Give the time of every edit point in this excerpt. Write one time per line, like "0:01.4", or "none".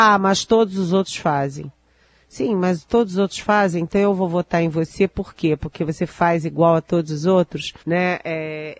0:07.8